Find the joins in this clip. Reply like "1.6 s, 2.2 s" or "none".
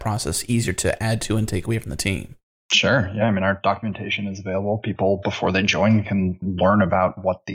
none